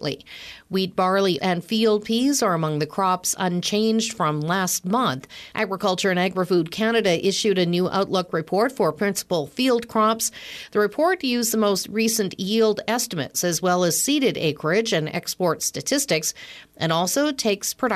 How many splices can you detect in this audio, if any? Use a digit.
2